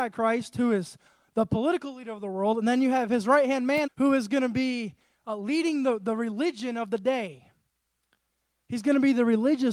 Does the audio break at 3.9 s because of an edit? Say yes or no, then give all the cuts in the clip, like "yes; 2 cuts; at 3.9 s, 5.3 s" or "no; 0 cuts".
yes; 1 cut; at 3.9 s